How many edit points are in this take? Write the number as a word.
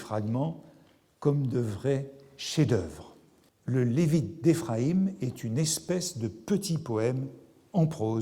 one